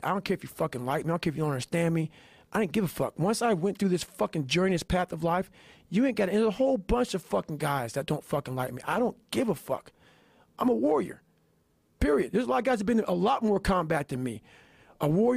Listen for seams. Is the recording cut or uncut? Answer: uncut